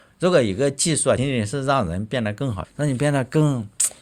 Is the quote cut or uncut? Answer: cut